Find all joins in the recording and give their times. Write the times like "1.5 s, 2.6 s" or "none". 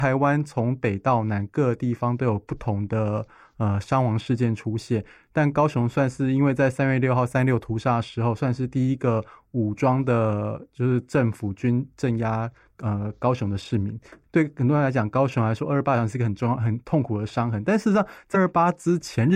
18.3 s